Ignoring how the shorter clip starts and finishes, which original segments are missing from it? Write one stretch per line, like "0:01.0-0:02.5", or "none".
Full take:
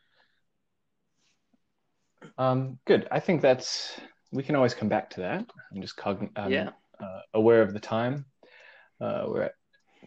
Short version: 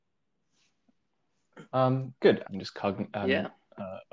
0:03.1-0:05.7